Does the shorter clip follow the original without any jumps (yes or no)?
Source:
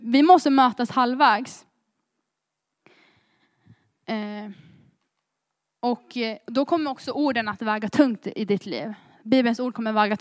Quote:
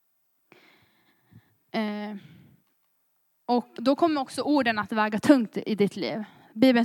no